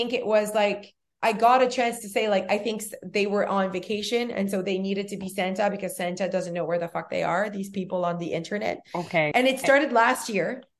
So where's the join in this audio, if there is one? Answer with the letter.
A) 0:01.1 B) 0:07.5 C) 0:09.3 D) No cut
C